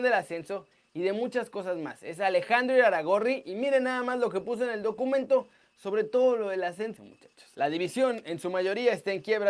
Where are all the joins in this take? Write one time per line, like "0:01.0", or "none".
0:07.0